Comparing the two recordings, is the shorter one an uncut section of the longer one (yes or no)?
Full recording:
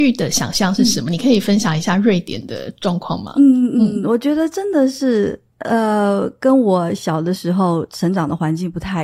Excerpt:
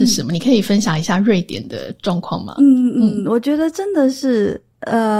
yes